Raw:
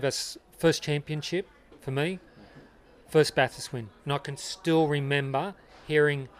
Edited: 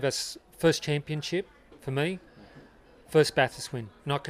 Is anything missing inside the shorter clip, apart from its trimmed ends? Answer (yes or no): no